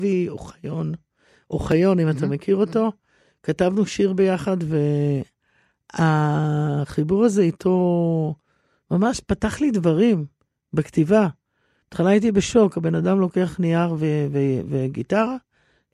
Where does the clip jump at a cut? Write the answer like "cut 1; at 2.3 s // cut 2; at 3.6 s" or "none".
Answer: none